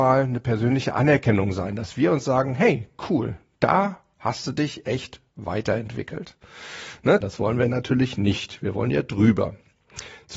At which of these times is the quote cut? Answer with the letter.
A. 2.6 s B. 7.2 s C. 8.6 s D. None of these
B